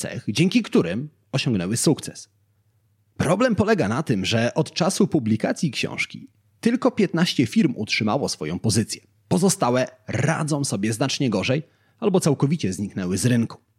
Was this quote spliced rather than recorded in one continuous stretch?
no; 0 cuts

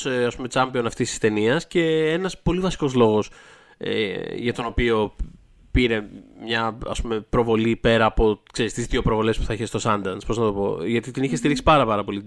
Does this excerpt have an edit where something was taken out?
no; 0 cuts

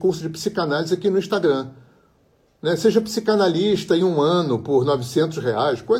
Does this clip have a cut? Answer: no; 0 cuts

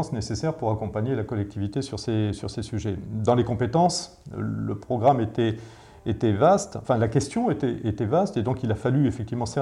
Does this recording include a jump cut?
no; 0 cuts

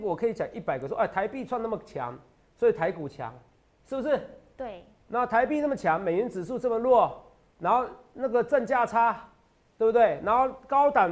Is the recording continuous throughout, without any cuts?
yes; 0 cuts

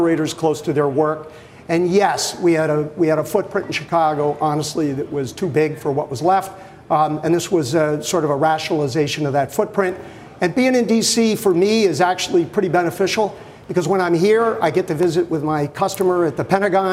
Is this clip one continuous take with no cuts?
yes; 0 cuts

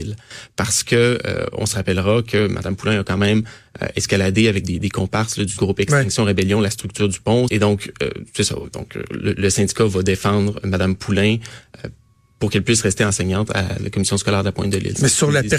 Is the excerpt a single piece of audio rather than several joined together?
no; 1 cut; at 7.5 s

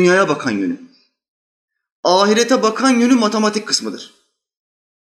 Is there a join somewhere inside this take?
no; 0 cuts

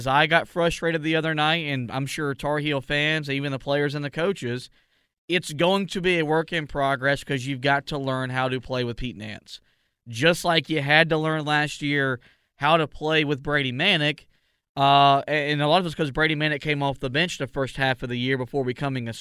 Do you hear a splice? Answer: no; 0 cuts

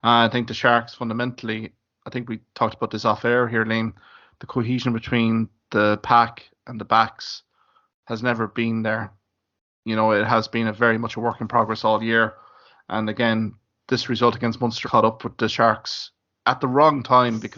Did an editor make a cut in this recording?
yes; 1 cut; at 14.8 s

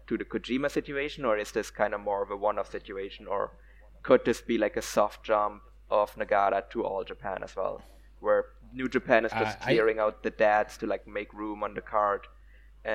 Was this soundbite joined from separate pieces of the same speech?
no; 0 cuts

